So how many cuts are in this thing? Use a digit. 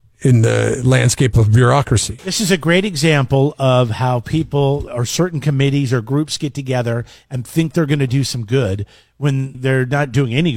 3